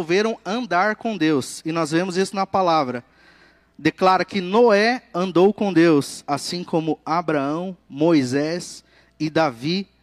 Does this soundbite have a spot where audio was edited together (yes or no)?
no